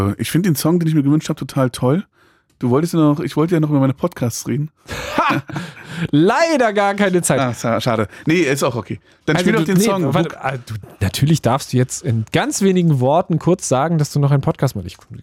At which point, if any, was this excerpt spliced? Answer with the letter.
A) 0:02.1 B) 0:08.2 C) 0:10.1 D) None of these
D